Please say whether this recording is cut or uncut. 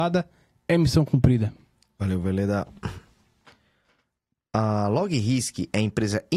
uncut